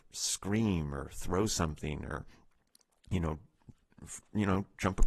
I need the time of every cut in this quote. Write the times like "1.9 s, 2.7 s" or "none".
none